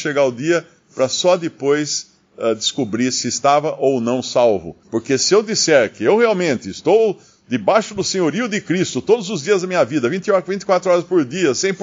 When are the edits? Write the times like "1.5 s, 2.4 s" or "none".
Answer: 4.8 s